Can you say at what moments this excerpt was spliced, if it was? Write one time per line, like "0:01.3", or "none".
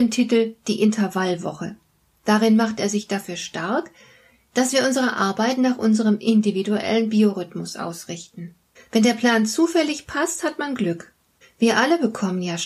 0:08.8
0:11.4